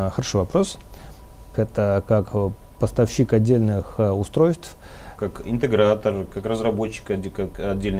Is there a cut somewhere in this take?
yes; 3 cuts; at 1.5 s, 5.2 s, 6.3 s

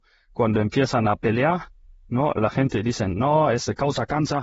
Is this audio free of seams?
yes; 0 cuts

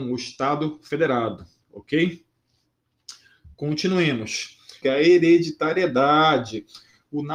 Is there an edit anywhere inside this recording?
yes; 1 cut; at 4.8 s

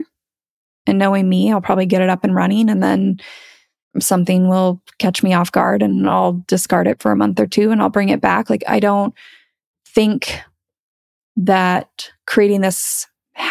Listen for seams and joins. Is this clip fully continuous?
yes; 0 cuts

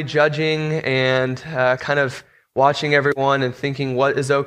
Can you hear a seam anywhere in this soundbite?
no; 0 cuts

